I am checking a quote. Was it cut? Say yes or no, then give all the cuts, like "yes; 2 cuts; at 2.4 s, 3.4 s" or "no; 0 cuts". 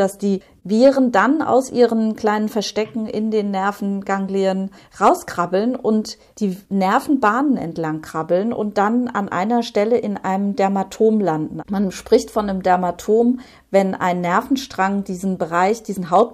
no; 0 cuts